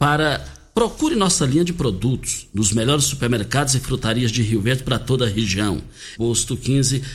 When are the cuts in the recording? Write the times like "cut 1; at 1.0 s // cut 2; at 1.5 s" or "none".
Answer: cut 1; at 6.2 s